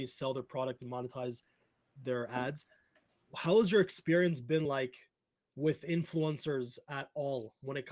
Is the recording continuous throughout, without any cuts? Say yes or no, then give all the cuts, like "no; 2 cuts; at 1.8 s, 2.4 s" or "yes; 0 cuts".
yes; 0 cuts